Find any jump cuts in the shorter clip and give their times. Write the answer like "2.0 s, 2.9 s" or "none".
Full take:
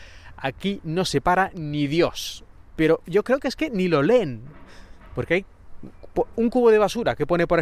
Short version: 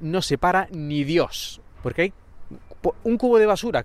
1.8 s